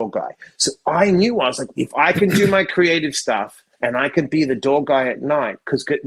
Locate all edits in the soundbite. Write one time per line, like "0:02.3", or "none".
0:01.7
0:03.7